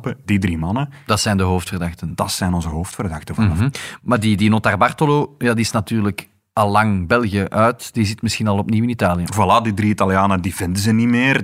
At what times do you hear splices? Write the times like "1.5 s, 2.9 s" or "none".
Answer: none